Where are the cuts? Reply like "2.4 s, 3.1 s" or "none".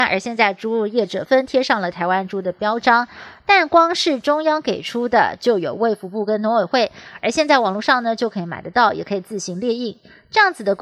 1.3 s